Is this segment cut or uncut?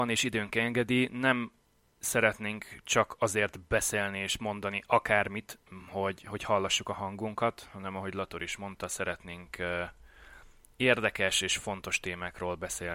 uncut